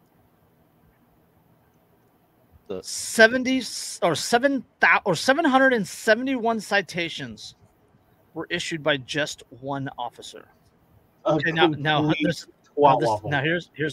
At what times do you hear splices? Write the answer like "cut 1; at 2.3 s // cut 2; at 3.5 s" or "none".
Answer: cut 1; at 11.2 s